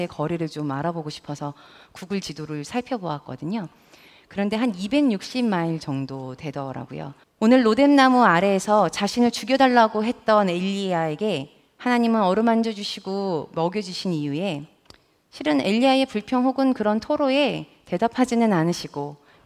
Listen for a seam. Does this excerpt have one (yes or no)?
yes